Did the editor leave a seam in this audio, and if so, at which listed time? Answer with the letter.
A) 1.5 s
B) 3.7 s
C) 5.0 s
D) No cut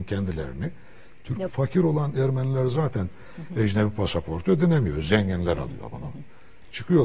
A